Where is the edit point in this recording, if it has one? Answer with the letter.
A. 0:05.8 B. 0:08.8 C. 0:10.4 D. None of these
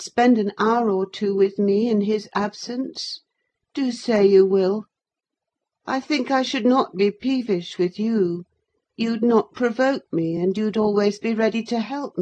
D